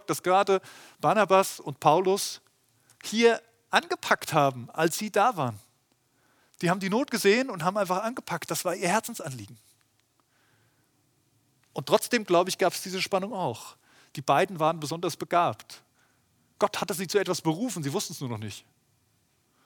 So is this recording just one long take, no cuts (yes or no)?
yes